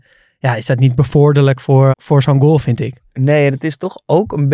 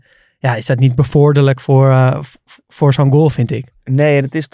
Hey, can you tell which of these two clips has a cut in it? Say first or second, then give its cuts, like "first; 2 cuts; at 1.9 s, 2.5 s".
first; 1 cut; at 1.9 s